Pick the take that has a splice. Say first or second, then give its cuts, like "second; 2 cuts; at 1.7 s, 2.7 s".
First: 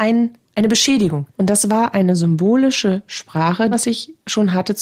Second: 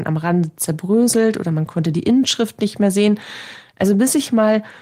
first; 2 cuts; at 1.3 s, 3.7 s